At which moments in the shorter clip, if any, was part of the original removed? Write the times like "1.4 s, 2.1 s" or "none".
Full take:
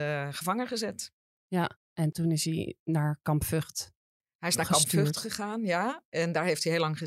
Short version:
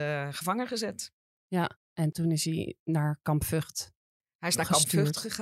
none